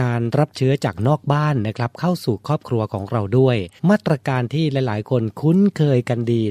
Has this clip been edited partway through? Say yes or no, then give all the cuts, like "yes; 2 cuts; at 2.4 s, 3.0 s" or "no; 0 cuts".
yes; 1 cut; at 3.8 s